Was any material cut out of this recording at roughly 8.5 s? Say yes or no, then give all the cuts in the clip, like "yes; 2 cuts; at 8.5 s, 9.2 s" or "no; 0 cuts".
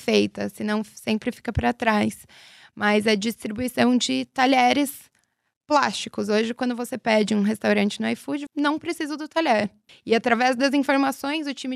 yes; 2 cuts; at 8.5 s, 9.9 s